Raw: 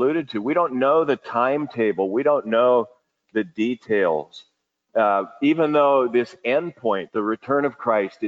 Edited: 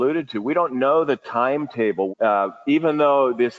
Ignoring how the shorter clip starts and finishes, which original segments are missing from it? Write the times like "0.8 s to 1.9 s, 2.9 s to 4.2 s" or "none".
2.1 s to 4.8 s

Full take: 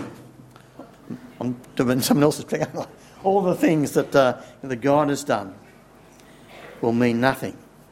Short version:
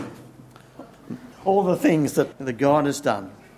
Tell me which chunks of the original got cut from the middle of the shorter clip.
1.3 s to 3.1 s, 4.1 s to 4.6 s

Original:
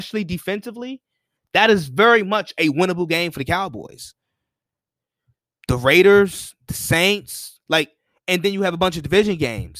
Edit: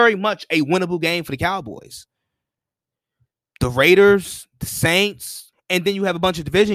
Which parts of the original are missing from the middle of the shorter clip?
7.6 s to 8.1 s

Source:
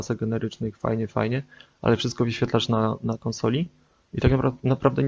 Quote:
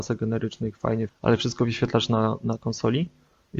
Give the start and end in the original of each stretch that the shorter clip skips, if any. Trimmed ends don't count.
1.1 s to 1.7 s

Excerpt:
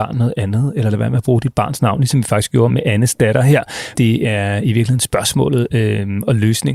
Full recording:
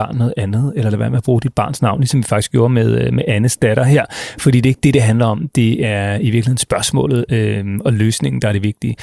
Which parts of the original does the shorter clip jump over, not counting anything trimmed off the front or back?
2.7 s to 3.1 s, 4.3 s to 5.5 s

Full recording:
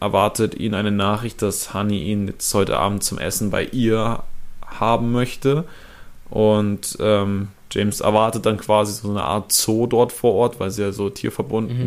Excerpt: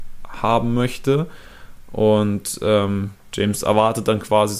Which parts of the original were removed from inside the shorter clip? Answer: none

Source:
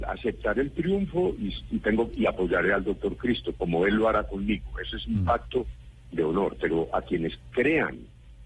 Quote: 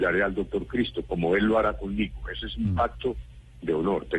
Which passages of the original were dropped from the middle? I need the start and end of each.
none

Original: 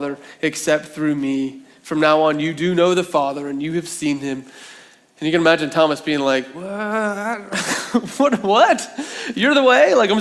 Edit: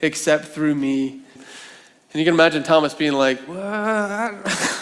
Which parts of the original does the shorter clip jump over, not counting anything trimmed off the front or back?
1.8 s to 4.4 s

